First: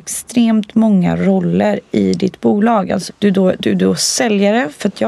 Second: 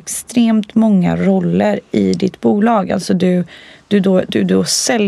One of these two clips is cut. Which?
first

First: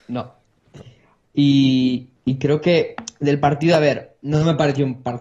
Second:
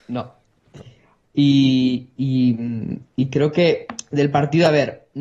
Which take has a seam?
first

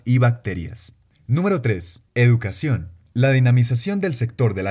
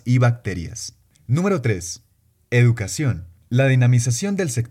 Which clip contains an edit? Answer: first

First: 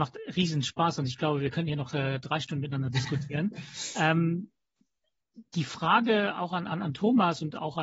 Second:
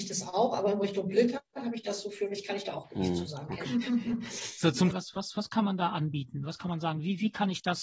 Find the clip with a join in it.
second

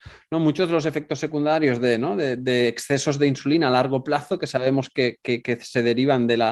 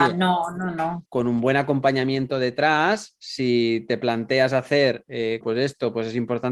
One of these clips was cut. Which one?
second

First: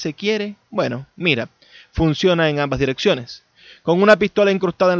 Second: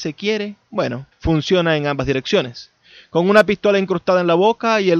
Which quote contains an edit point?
second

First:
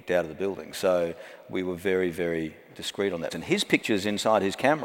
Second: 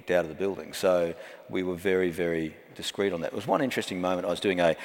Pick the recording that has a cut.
first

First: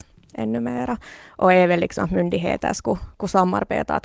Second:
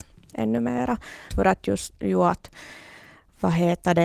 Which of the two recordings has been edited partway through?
second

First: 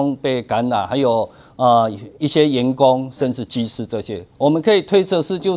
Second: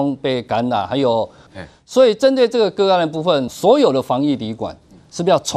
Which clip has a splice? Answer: second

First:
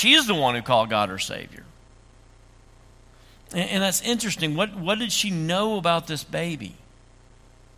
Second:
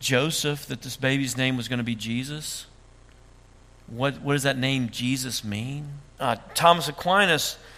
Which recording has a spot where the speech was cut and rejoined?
second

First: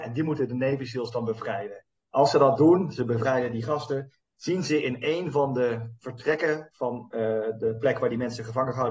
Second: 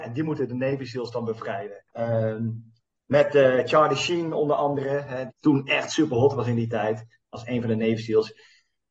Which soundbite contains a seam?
second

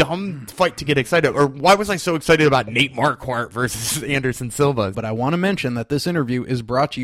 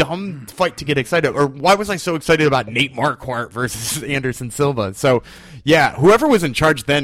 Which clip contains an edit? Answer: first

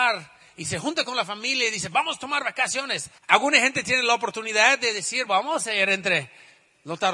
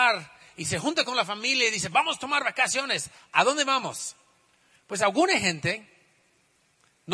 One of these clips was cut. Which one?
first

